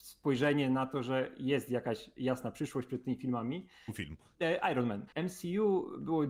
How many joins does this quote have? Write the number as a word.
two